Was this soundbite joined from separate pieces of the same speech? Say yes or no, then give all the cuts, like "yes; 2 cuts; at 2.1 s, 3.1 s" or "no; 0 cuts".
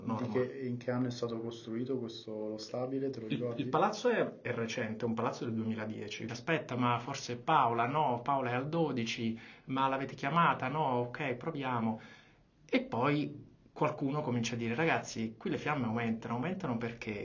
yes; 1 cut; at 6.3 s